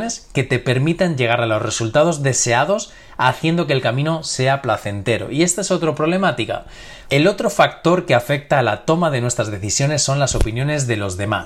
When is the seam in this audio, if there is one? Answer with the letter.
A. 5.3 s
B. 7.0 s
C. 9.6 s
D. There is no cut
B